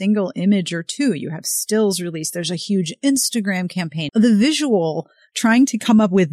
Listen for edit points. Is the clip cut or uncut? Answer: cut